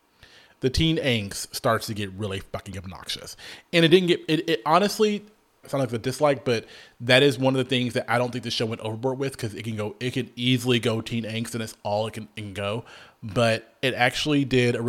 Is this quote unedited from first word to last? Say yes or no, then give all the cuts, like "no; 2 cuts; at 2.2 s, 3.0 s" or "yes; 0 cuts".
no; 1 cut; at 5.6 s